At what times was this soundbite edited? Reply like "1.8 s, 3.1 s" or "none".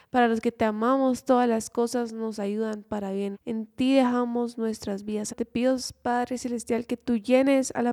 3.3 s, 5.3 s